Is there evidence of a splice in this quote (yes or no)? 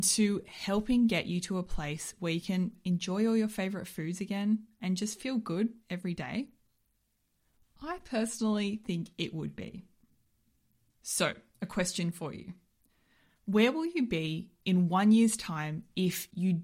no